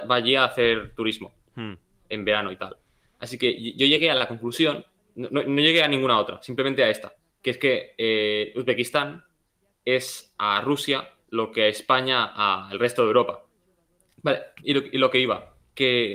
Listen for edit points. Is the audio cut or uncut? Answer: cut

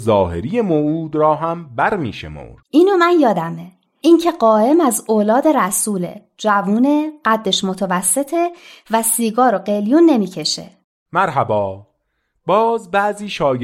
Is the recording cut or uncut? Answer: cut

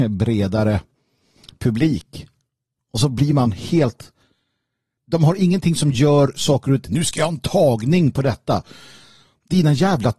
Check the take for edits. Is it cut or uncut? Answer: cut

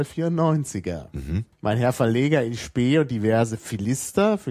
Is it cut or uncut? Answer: cut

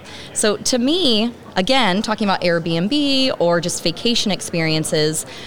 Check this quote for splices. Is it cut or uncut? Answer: uncut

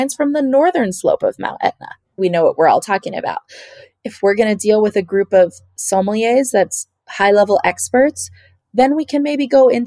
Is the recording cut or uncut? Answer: cut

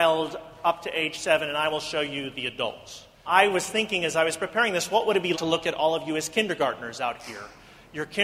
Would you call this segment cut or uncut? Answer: cut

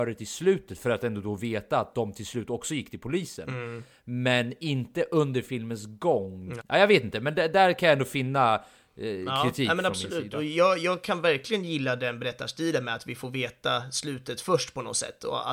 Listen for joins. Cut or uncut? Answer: cut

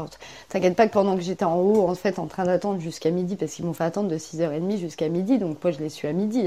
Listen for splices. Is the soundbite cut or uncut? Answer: uncut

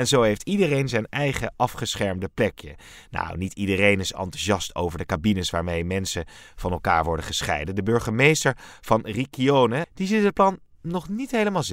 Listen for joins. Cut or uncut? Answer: cut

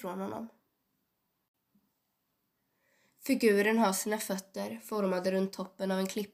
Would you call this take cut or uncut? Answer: uncut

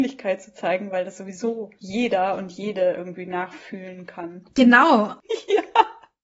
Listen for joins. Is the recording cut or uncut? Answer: cut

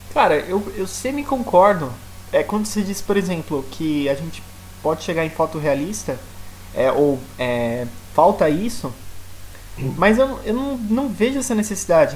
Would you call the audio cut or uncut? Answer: uncut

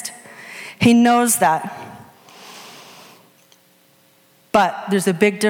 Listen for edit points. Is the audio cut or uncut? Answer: uncut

